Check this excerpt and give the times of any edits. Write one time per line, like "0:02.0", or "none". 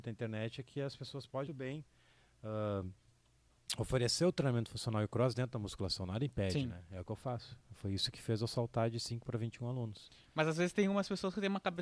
0:01.5